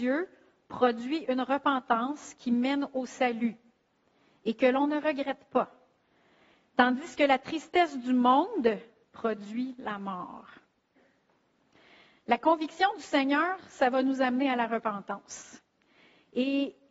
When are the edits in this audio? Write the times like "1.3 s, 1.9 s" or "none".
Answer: none